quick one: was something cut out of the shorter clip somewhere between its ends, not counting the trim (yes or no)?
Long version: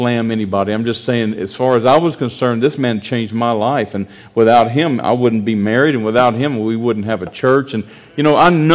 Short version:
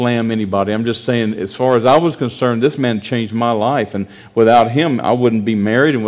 no